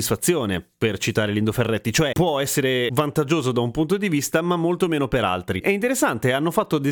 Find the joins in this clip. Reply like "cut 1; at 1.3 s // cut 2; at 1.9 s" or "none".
cut 1; at 5.6 s